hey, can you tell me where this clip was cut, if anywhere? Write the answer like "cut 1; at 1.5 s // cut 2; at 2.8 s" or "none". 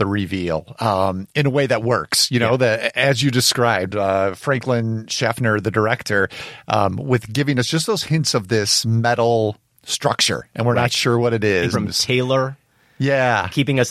cut 1; at 11.7 s

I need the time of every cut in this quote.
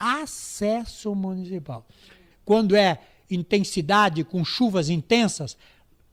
cut 1; at 2.3 s

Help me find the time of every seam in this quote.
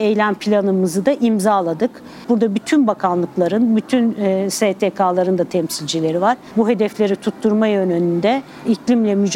cut 1; at 2.2 s // cut 2; at 6.5 s

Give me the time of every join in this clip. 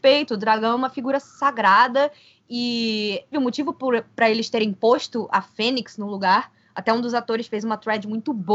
cut 1; at 3.3 s

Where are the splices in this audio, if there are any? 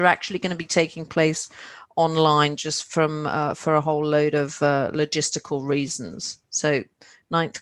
cut 1; at 6.4 s

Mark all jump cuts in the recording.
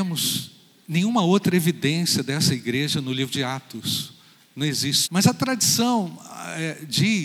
cut 1; at 5.0 s

